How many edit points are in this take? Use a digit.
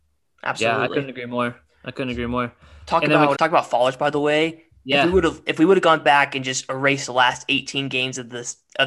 1